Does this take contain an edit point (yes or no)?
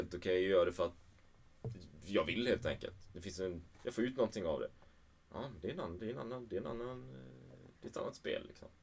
yes